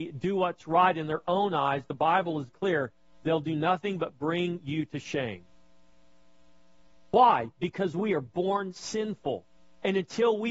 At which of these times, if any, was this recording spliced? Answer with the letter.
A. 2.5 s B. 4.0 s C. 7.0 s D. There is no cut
A